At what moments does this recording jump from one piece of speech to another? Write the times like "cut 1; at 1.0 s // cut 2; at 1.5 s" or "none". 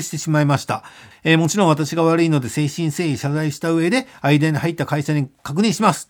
cut 1; at 1.1 s